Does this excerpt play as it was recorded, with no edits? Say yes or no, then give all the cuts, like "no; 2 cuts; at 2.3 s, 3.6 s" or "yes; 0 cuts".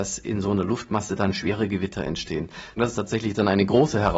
no; 1 cut; at 2.8 s